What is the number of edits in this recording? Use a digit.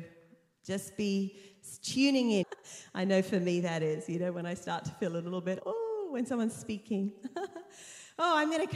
2